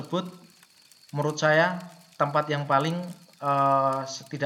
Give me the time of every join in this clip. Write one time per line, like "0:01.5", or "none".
none